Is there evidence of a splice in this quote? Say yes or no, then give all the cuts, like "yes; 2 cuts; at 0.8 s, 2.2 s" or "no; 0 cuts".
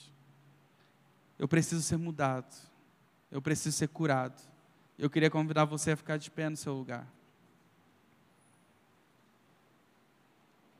yes; 1 cut; at 4.9 s